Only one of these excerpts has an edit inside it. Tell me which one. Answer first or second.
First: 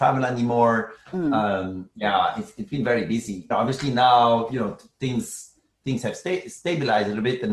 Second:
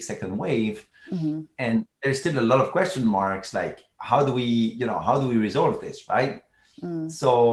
first